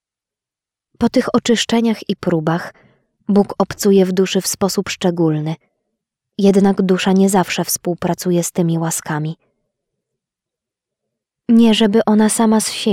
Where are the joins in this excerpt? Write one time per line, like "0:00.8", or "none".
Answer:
none